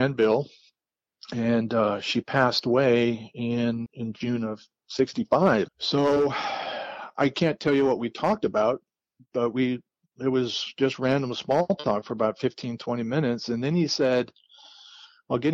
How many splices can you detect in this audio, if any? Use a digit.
2